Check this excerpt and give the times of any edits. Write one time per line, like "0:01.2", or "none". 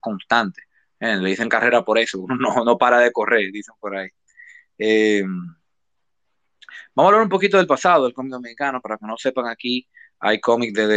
none

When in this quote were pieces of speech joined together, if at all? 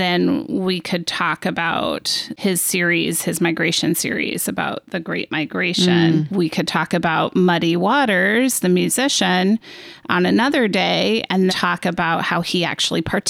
0:06.3
0:11.5

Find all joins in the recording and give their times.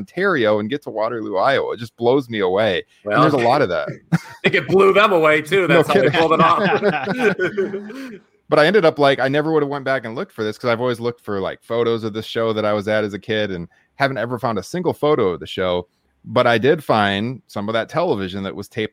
none

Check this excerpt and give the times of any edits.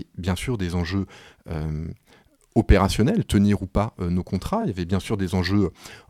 none

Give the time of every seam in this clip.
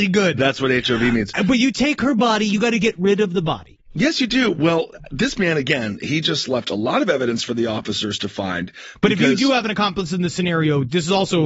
none

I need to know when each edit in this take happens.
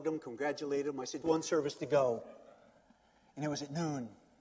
0:01.2

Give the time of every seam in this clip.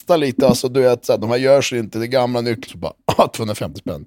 0:02.7

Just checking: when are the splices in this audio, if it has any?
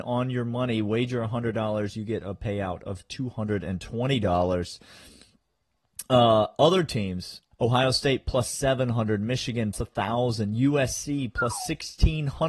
0:07.5
0:09.7

